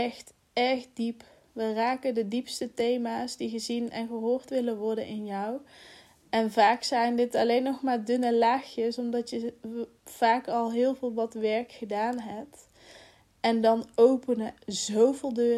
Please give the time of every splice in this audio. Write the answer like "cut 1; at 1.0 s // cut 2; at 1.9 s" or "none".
cut 1; at 14.6 s